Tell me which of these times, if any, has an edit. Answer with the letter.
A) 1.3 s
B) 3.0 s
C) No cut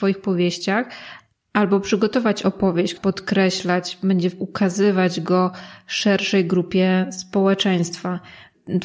B